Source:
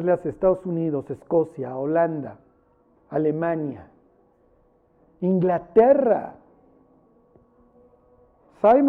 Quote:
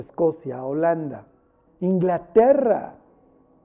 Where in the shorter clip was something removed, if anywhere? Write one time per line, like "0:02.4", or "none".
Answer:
0:01.6